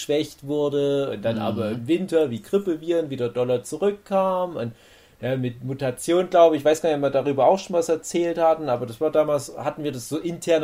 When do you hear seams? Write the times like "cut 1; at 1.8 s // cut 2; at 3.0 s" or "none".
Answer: none